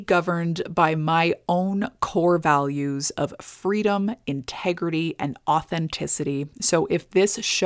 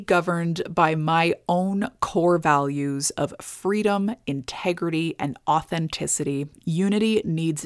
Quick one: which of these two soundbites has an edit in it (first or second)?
second